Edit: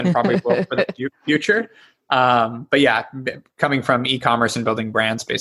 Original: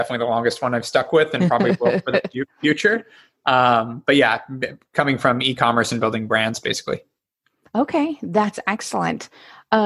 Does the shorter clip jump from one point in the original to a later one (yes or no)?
no